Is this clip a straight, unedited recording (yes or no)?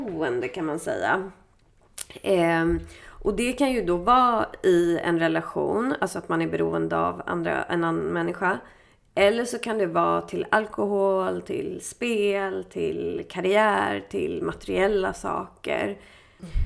yes